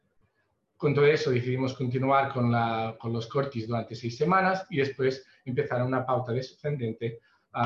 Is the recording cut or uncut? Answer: uncut